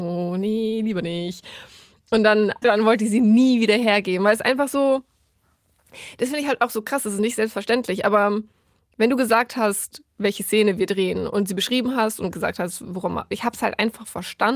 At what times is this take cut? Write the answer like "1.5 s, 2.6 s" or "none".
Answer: 2.6 s, 13.3 s